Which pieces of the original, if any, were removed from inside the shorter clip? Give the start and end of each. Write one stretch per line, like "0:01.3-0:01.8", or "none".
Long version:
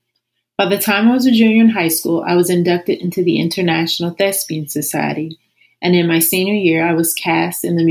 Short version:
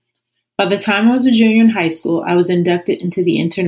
none